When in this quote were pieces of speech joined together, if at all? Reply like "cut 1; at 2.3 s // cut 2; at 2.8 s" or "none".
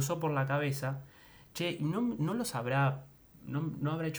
none